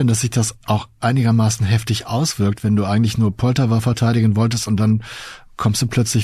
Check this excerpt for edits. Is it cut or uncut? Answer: uncut